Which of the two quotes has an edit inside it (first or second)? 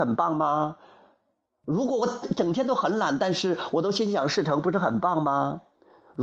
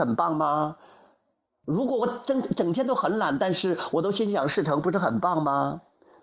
first